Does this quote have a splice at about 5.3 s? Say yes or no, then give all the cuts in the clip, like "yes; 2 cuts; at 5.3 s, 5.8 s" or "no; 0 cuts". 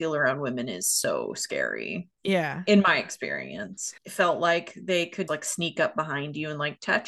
yes; 2 cuts; at 4.0 s, 5.3 s